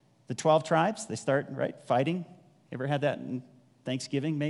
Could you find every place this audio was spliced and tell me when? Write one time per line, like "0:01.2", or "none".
none